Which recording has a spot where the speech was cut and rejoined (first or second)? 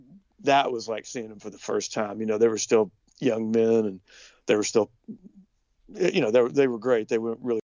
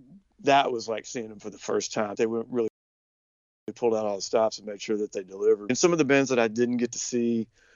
second